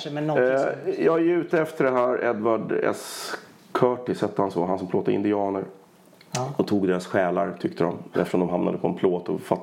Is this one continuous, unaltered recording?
yes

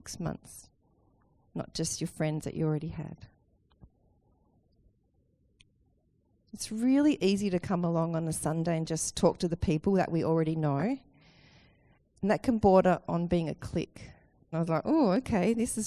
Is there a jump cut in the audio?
yes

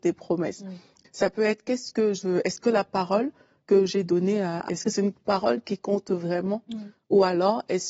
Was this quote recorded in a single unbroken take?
no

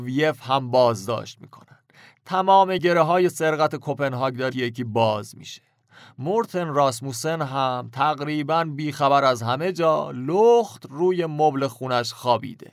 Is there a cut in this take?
yes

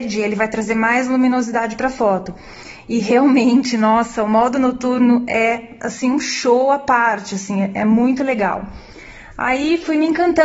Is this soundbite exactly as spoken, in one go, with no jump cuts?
yes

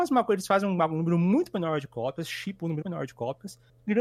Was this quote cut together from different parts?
yes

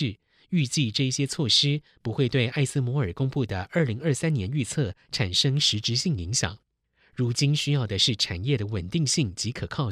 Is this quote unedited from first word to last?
yes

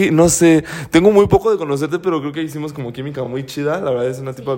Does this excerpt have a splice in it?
no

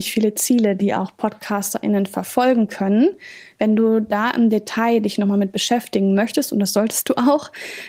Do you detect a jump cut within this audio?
no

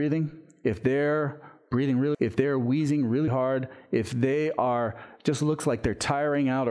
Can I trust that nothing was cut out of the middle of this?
no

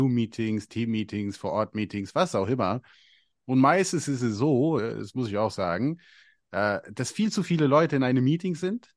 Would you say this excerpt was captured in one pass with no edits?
yes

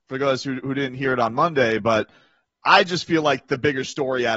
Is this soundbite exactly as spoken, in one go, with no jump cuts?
yes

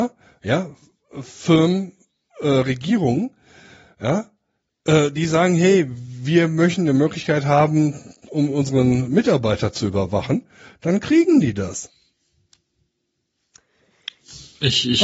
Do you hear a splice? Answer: no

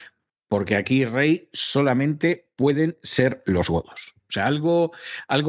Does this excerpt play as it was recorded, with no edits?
yes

